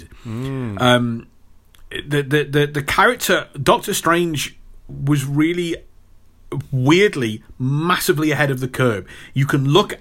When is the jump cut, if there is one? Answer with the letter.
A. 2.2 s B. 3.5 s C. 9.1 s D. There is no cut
B